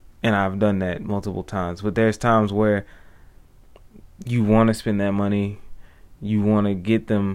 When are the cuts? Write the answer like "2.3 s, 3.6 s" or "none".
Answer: none